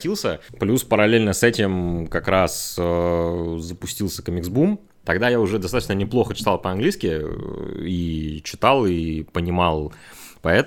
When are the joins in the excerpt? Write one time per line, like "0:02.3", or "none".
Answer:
0:05.0